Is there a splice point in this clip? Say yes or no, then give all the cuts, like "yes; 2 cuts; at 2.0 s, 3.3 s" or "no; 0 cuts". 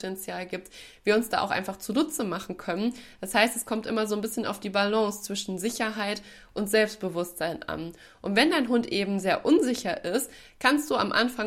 no; 0 cuts